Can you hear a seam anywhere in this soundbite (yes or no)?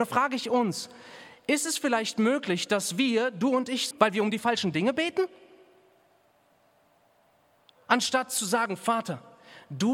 yes